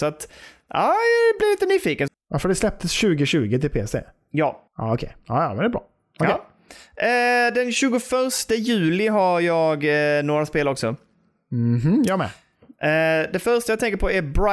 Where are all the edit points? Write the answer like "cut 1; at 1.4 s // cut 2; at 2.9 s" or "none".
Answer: cut 1; at 2.1 s // cut 2; at 4.7 s